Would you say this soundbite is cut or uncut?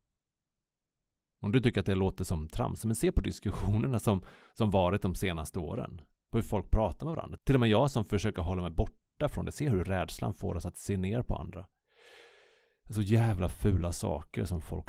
uncut